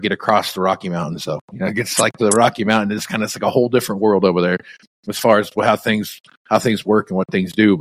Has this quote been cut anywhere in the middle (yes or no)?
no